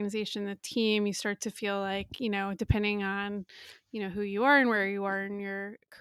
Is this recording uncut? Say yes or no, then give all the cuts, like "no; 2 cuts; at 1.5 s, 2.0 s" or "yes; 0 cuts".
yes; 0 cuts